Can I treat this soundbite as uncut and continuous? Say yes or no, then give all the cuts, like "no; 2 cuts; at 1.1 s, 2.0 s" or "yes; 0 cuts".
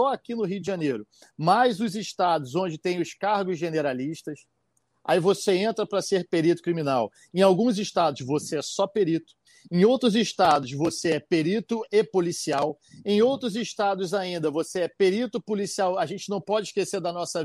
yes; 0 cuts